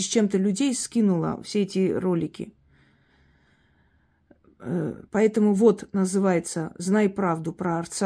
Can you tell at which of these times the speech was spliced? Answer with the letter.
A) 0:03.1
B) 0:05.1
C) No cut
B